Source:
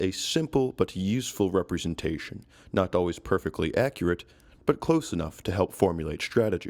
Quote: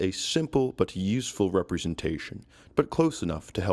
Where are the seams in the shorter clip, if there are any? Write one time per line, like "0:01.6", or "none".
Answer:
0:02.7